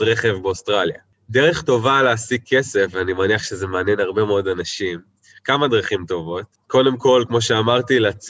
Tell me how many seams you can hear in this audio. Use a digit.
0